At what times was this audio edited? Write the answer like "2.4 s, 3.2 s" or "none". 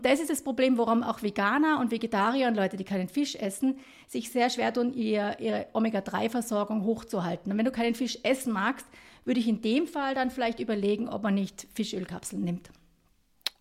none